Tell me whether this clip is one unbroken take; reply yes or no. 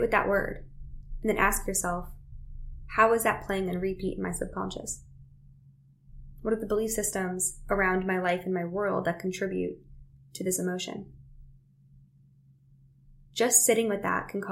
yes